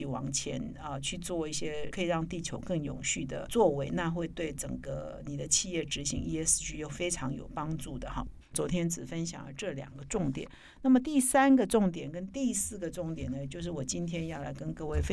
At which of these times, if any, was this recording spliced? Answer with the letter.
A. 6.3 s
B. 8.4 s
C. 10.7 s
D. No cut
B